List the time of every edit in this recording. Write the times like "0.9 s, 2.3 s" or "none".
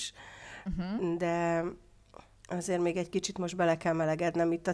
none